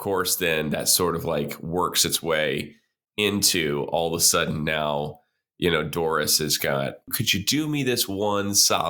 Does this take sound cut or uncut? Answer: cut